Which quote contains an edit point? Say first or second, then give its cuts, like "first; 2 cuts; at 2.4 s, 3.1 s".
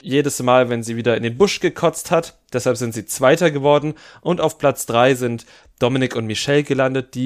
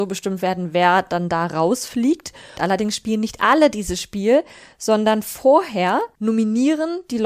second; 1 cut; at 2.6 s